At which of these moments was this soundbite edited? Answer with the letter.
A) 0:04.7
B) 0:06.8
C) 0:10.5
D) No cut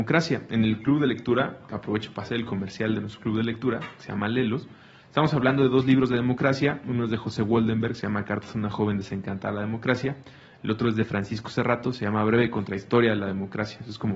D